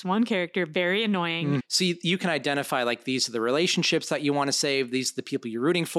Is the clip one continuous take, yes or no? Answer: no